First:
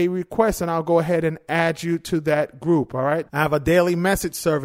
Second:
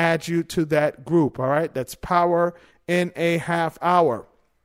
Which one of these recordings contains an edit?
first; 1 cut; at 3.3 s

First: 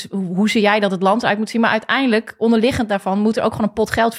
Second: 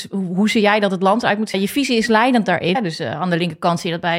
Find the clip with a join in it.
second; 2 cuts; at 1.5 s, 2.7 s

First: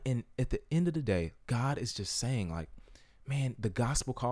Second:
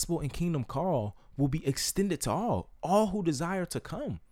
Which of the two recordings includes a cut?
first; 1 cut; at 1.4 s

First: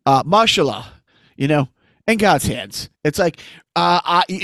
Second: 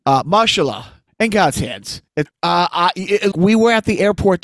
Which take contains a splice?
second; 3 cuts; at 1.1 s, 2.3 s, 3.3 s

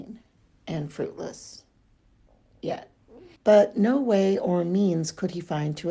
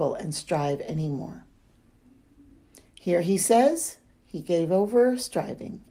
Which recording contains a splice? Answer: first; 1 cut; at 3.4 s

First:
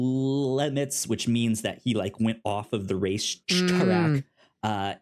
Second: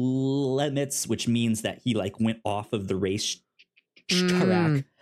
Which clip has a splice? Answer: first; 1 cut; at 3.4 s

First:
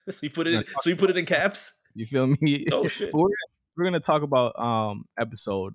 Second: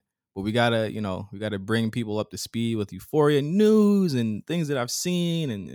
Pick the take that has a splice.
first; 1 cut; at 1.9 s

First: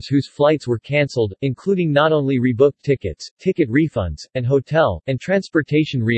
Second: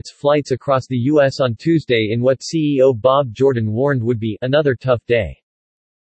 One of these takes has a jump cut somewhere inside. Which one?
first; 1 cut; at 5.0 s

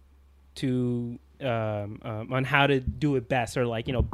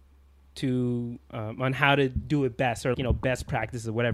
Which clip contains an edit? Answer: second; 2 cuts; at 1.3 s, 2.9 s

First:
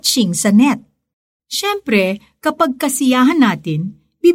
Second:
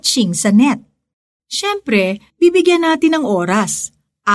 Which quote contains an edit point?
second; 1 cut; at 2.3 s

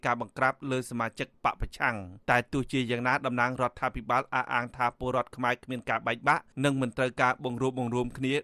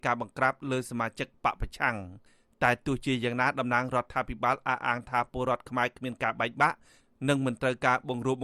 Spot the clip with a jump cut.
first; 2 cuts; at 2.2 s, 6.5 s

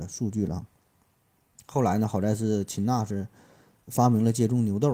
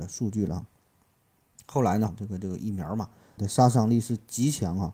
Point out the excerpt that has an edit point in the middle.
second; 2 cuts; at 2.1 s, 3.4 s

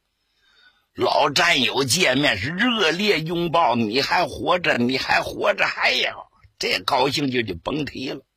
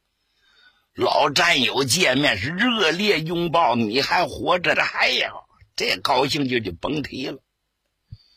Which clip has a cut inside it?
second; 1 cut; at 4.7 s

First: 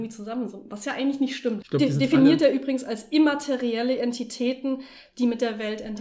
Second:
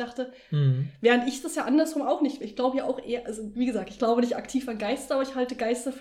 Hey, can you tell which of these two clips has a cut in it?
first; 1 cut; at 1.6 s

